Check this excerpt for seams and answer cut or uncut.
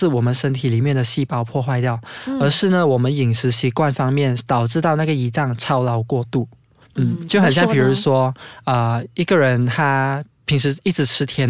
uncut